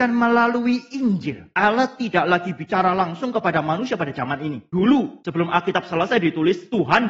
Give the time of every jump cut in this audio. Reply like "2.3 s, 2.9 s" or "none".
none